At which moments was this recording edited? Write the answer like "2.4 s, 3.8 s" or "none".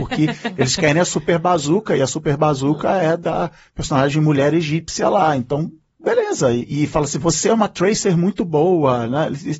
none